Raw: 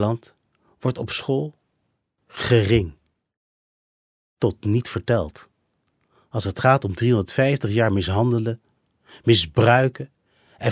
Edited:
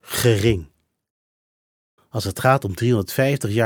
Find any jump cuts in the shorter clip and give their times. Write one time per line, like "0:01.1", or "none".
0:02.0